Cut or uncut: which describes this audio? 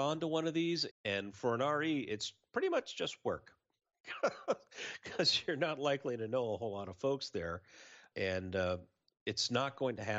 cut